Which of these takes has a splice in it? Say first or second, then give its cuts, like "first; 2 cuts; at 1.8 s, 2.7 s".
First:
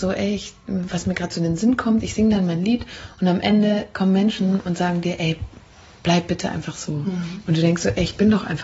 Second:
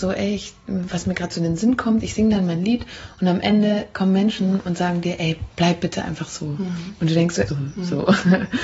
second; 2 cuts; at 5.5 s, 7.5 s